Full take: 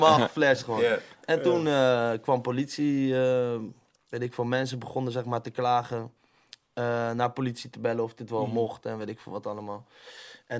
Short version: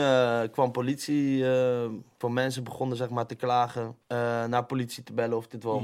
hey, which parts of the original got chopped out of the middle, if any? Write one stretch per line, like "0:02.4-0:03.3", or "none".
0:03.9-0:04.4
0:06.2-0:06.7